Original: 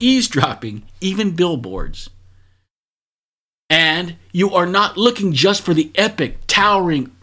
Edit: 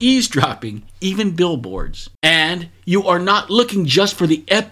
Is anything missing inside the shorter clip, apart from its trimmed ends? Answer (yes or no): yes